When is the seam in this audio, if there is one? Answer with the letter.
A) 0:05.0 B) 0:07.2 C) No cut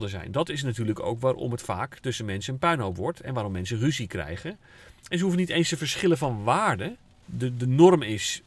B